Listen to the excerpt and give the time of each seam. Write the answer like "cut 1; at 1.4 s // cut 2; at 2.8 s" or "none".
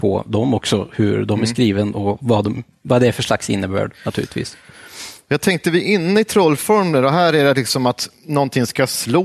none